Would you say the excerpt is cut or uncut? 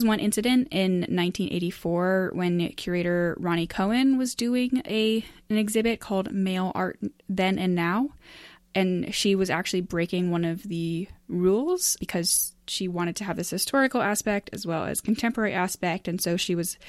cut